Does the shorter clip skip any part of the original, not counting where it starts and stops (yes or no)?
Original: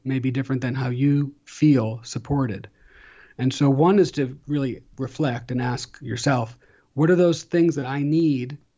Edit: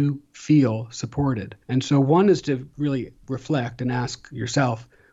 yes